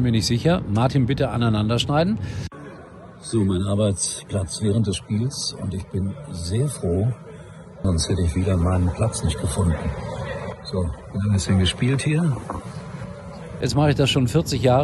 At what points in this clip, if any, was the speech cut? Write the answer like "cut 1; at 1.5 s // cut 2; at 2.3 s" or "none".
cut 1; at 7.8 s // cut 2; at 13.6 s